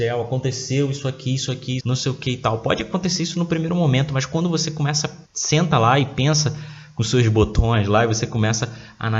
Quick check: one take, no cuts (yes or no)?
no